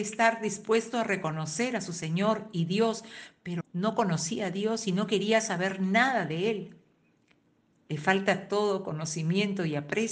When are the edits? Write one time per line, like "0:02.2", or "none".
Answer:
0:03.6